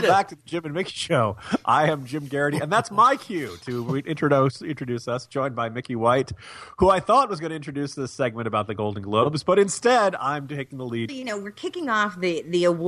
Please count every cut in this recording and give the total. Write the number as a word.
one